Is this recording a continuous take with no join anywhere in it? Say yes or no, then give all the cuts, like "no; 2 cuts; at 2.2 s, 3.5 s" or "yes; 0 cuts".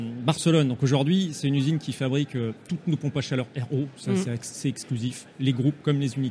yes; 0 cuts